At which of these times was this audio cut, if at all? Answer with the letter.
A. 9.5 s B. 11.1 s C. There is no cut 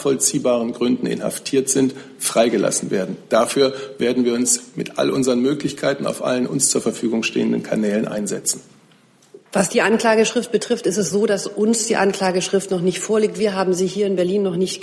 A